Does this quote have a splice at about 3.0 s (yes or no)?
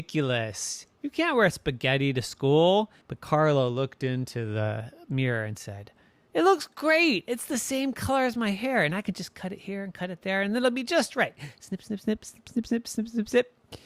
yes